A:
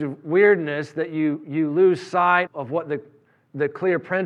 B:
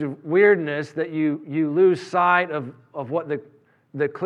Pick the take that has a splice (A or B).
A